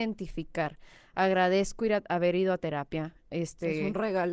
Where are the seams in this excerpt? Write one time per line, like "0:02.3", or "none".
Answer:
none